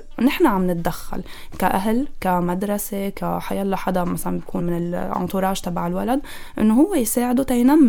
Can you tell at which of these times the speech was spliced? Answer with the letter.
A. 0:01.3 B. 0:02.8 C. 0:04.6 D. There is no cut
C